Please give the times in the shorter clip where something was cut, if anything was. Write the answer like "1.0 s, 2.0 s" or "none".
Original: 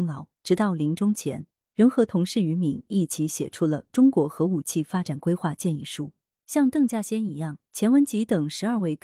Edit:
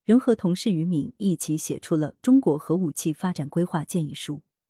none